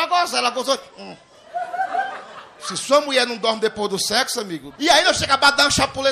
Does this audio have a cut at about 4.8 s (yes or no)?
yes